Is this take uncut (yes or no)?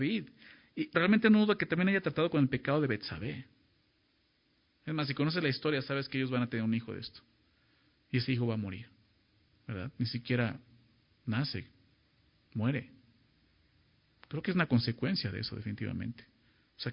no